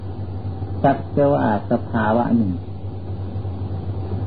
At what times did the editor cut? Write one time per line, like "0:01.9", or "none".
none